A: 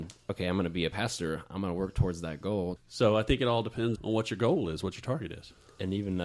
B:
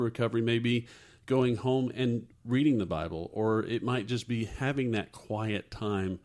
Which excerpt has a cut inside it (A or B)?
A